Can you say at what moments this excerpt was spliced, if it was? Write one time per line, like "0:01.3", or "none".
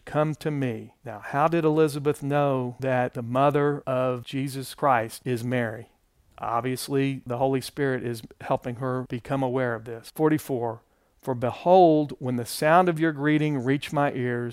0:05.2